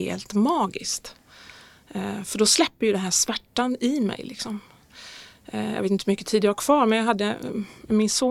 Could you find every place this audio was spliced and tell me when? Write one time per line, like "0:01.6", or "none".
none